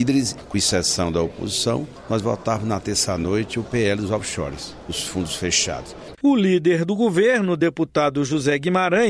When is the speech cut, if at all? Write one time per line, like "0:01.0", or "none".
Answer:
0:06.1